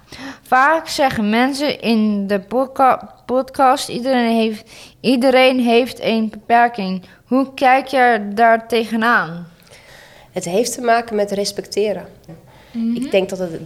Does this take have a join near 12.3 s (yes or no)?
yes